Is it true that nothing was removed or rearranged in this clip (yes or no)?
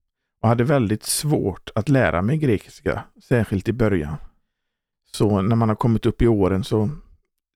no